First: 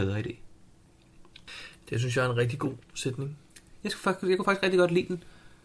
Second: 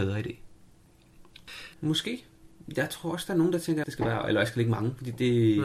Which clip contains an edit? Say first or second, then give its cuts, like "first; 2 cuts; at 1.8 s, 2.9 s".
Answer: second; 2 cuts; at 1.7 s, 3.8 s